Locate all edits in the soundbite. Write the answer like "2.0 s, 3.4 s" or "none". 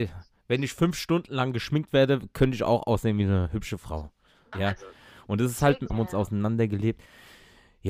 4.5 s, 5.9 s